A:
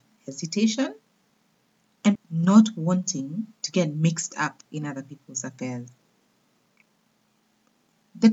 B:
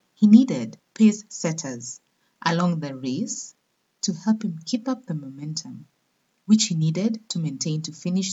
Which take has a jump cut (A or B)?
A